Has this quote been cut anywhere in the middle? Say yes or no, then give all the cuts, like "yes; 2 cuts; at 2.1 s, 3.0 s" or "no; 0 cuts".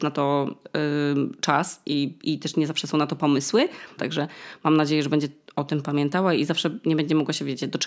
yes; 1 cut; at 4.0 s